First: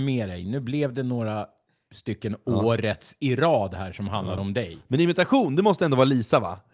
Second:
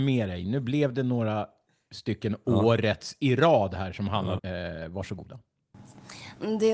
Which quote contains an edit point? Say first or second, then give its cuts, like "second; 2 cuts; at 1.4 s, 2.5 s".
second; 1 cut; at 4.4 s